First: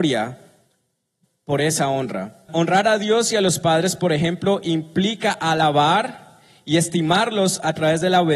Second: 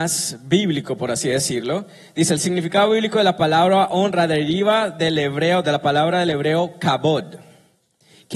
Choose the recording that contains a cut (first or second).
first